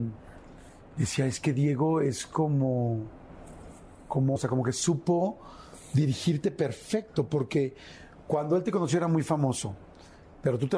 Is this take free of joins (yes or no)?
no